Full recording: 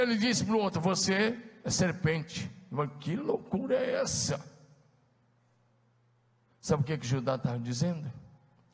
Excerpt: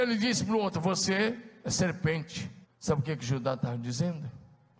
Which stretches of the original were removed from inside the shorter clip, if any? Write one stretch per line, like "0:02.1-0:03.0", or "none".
0:02.6-0:06.4